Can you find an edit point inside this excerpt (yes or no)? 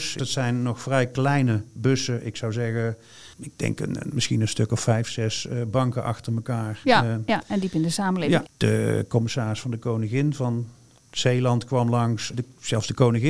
yes